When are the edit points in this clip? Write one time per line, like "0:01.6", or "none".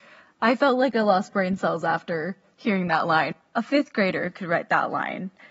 none